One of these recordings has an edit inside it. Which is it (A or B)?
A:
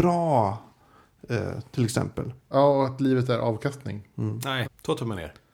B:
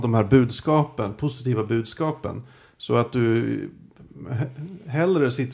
A